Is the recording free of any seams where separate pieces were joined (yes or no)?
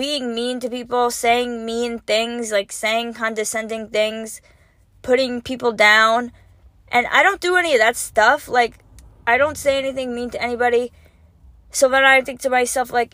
yes